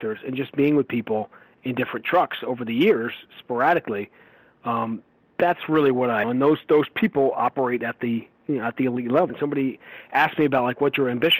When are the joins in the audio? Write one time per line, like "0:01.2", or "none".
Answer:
0:06.2
0:09.3